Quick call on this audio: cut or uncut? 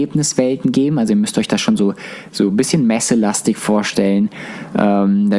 uncut